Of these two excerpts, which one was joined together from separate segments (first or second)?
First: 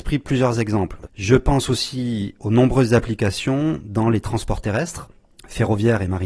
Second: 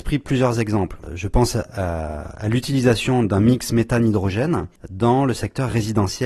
first